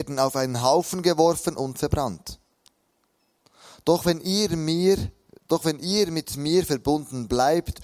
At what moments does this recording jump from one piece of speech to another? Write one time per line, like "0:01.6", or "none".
none